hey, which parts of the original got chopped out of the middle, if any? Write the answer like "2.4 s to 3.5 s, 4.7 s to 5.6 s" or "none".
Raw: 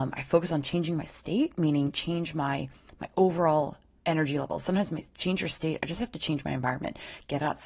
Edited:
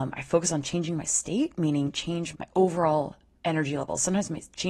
2.3 s to 2.9 s